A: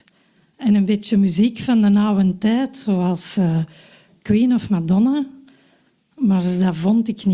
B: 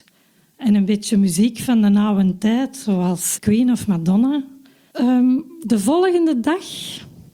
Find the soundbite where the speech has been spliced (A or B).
B